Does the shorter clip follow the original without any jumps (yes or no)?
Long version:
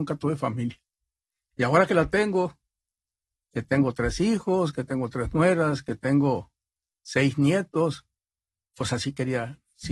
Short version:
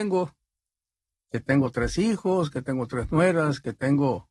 yes